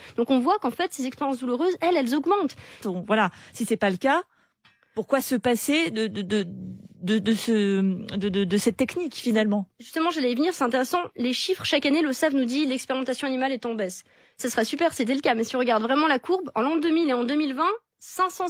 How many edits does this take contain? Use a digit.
1